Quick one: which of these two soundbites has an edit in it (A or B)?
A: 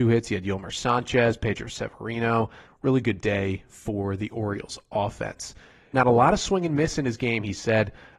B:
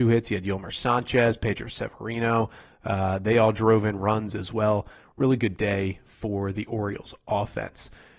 A